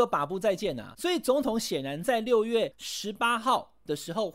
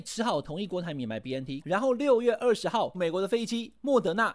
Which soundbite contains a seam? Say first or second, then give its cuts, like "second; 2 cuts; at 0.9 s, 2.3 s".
second; 2 cuts; at 1.6 s, 2.9 s